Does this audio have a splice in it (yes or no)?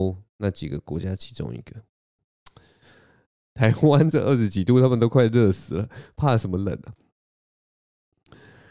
yes